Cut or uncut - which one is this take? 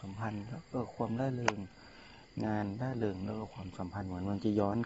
uncut